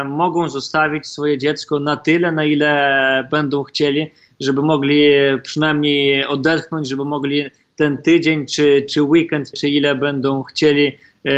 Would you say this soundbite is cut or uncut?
cut